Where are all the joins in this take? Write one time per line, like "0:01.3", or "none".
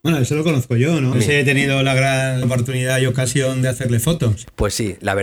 0:01.1
0:02.4